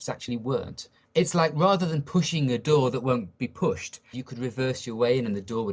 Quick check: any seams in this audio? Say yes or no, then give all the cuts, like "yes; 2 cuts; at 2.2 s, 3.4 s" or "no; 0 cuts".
yes; 1 cut; at 4.1 s